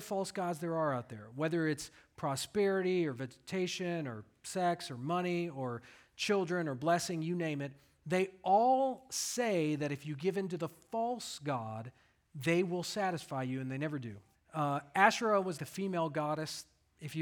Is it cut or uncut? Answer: cut